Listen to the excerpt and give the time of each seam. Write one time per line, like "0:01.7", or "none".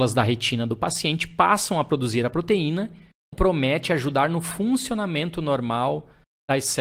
0:03.3